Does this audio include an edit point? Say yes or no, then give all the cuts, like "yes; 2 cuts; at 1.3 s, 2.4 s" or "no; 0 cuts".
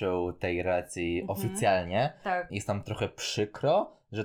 yes; 1 cut; at 2.5 s